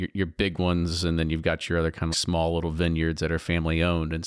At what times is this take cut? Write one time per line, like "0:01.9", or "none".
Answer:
0:02.1